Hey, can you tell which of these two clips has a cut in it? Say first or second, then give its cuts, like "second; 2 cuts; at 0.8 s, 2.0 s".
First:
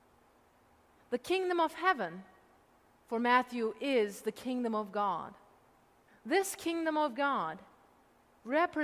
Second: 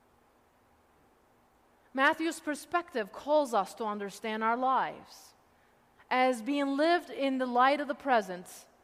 first; 2 cuts; at 1.0 s, 6.1 s